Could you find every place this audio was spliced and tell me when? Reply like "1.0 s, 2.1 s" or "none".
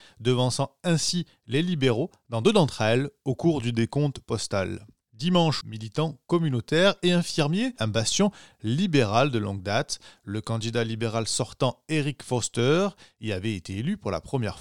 5.6 s, 7.8 s